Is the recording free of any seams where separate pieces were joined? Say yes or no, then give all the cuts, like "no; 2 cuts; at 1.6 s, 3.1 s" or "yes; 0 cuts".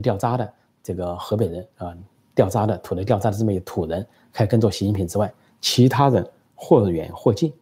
yes; 0 cuts